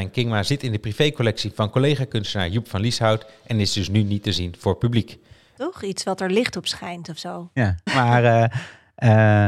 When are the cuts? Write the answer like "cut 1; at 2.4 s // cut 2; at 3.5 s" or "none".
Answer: cut 1; at 5.6 s // cut 2; at 7.9 s